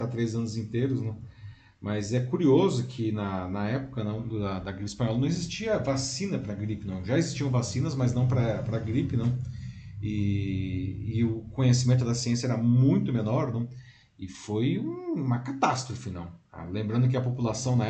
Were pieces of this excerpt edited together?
no; 0 cuts

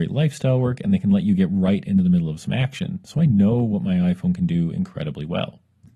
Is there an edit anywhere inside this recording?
no; 0 cuts

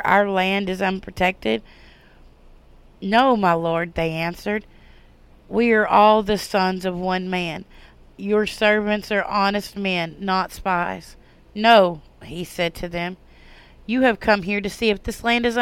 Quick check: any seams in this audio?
yes; 1 cut; at 5.3 s

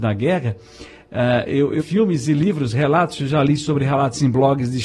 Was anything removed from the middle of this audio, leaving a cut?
yes; 1 cut; at 1.8 s

